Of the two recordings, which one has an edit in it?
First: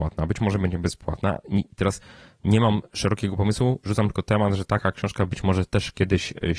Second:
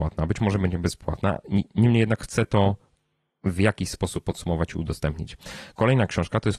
first; 1 cut; at 1.7 s

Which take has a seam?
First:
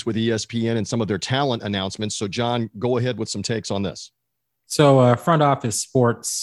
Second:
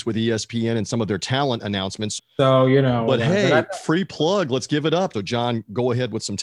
second; 2 cuts; at 2.2 s, 5.1 s

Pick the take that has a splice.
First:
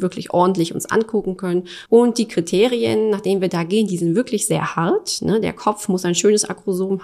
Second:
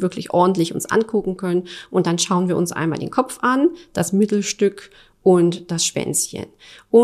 first; 1 cut; at 1.9 s

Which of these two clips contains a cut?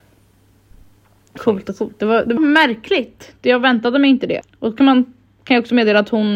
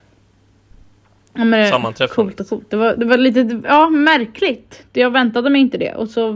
first; 3 cuts; at 1.4 s, 2.4 s, 4.4 s

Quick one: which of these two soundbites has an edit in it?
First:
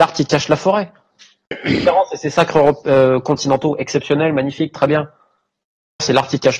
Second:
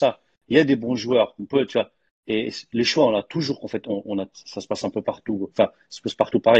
second; 2 cuts; at 2.1 s, 4.3 s

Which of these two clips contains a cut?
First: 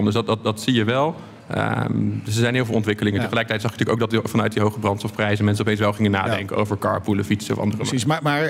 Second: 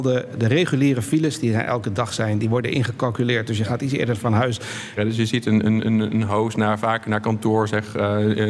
second; 1 cut; at 5.0 s

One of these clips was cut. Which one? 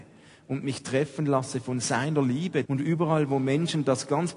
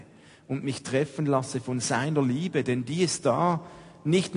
first; 1 cut; at 2.6 s

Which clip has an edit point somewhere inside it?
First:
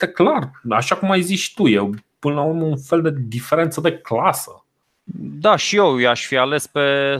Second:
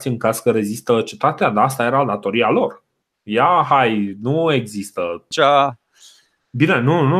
second; 1 cut; at 5.3 s

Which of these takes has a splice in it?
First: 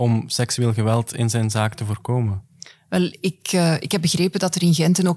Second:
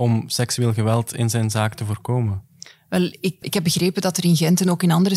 second; 1 cut; at 3.4 s

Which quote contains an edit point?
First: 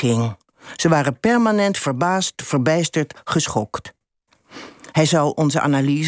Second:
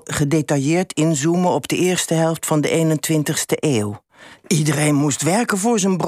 second; 1 cut; at 4.4 s

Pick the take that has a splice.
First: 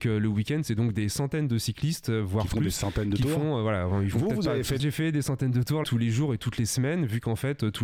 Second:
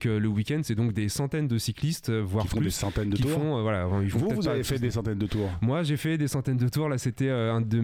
first; 2 cuts; at 4.8 s, 5.8 s

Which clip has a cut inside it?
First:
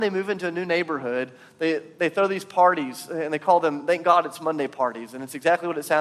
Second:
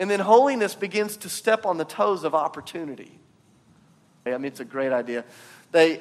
second; 1 cut; at 4.3 s

